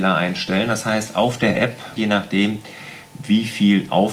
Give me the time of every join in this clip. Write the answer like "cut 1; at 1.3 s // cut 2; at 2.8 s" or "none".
cut 1; at 2.0 s